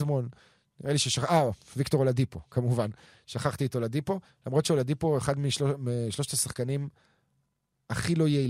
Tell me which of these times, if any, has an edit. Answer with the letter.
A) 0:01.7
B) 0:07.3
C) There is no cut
C